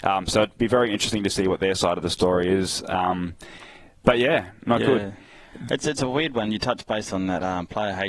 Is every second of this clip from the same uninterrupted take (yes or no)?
yes